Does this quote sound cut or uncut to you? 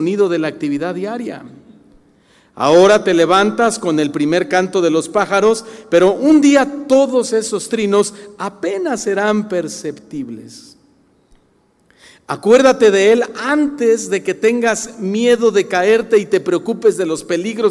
uncut